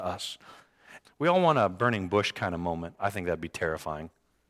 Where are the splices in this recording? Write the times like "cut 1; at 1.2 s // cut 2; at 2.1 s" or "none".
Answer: cut 1; at 1.0 s // cut 2; at 3.0 s